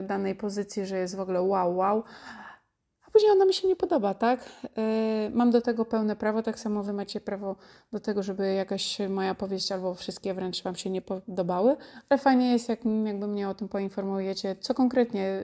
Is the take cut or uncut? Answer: uncut